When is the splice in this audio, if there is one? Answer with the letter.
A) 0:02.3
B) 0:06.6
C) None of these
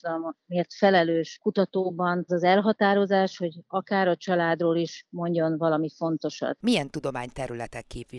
A